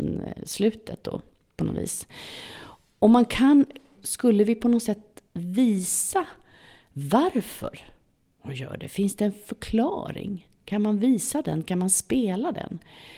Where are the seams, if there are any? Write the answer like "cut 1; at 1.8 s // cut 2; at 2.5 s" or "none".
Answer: cut 1; at 3.9 s